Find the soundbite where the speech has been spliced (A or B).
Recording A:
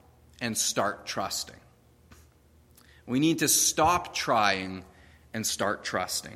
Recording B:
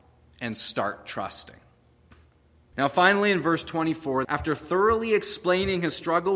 B